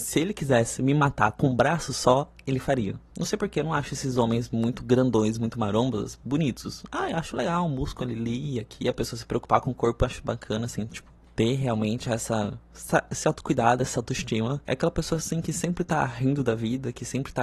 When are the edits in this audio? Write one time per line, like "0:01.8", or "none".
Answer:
0:03.1
0:14.6